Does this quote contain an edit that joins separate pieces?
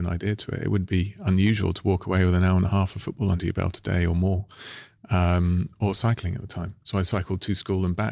no; 0 cuts

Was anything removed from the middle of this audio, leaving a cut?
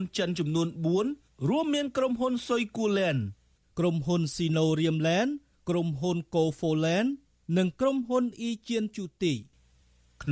no; 0 cuts

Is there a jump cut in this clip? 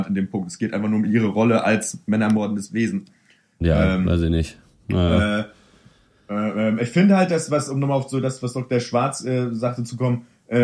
no; 0 cuts

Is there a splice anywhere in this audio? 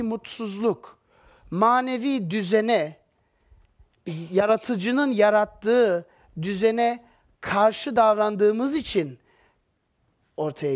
no; 0 cuts

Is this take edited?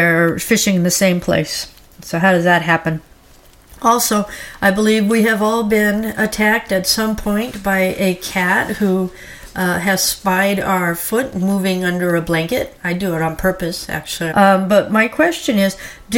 yes; 1 cut; at 14.3 s

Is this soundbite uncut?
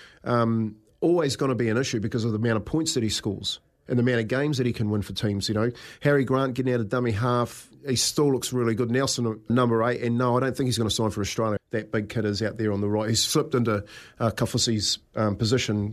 no; 2 cuts; at 9.5 s, 11.6 s

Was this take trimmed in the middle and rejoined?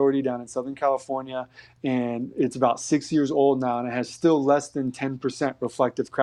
no; 0 cuts

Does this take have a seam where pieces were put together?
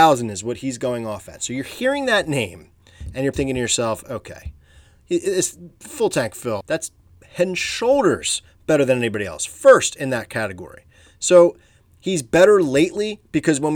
yes; 2 cuts; at 3.3 s, 6.6 s

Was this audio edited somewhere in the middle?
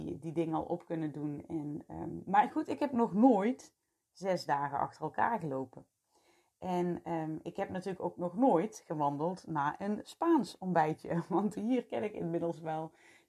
no; 0 cuts

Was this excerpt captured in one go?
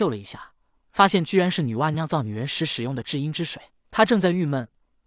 no; 2 cuts; at 1.9 s, 3.7 s

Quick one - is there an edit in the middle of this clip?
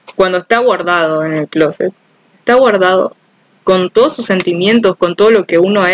no; 0 cuts

